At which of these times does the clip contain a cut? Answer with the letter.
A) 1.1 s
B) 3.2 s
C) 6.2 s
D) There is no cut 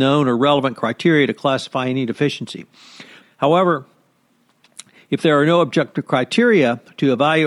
B